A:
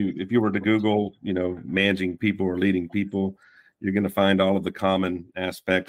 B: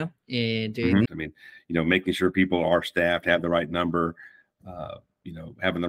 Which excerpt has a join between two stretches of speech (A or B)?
B